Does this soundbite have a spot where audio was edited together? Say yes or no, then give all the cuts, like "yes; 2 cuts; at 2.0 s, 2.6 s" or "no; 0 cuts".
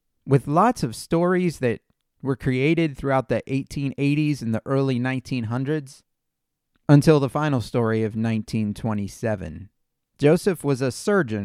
yes; 1 cut; at 10.1 s